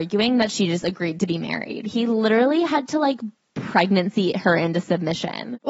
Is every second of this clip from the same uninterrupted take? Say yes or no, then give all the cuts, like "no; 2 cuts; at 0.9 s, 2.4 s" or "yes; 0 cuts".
yes; 0 cuts